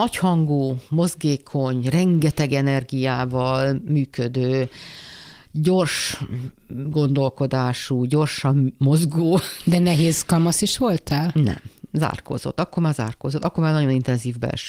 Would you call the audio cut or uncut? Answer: uncut